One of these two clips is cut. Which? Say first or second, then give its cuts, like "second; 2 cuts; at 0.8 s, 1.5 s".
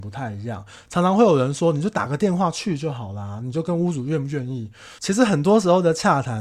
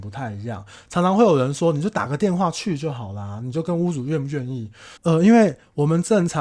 second; 1 cut; at 5.0 s